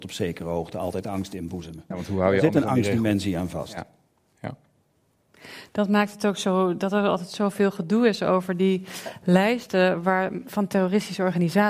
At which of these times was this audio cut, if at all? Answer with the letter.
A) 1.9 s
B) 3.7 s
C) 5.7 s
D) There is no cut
A